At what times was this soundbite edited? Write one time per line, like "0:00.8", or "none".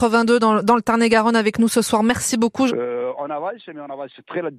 0:02.7